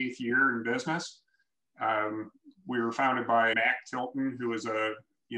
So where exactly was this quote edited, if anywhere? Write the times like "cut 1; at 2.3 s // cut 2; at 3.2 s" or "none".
cut 1; at 3.5 s